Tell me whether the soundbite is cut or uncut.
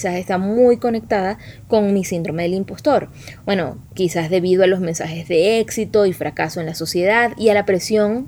cut